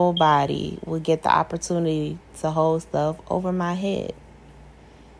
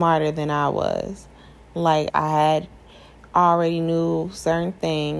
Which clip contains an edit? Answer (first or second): second